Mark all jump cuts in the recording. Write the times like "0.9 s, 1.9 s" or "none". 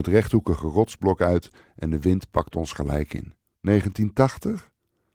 3.5 s

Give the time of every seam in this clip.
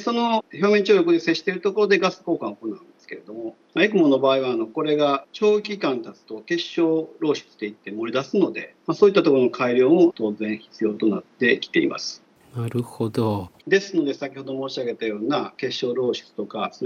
13.6 s

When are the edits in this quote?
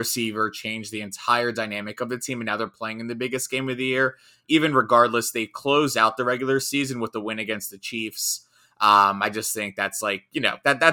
none

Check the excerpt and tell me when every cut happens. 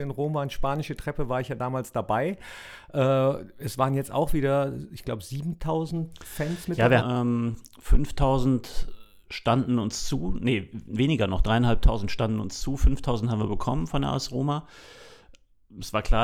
7.0 s

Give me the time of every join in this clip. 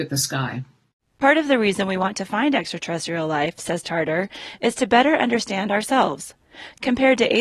none

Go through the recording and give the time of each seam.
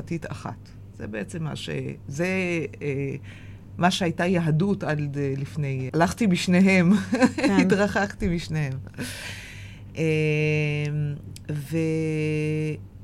5.9 s

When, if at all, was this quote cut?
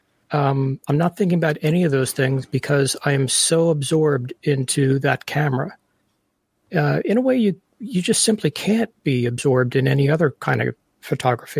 none

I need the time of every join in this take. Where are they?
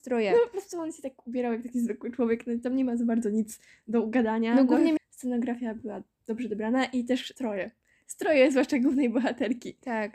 5.0 s

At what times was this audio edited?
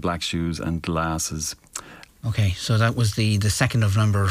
2.0 s

